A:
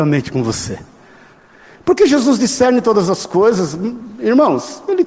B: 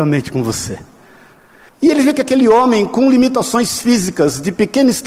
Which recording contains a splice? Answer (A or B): B